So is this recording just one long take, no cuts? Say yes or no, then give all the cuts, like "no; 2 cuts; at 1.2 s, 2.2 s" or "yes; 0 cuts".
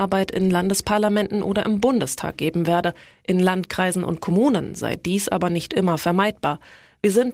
yes; 0 cuts